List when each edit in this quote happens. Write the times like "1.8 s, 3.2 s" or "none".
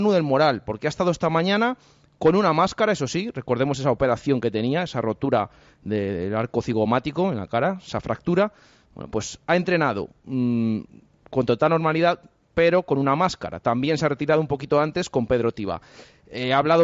none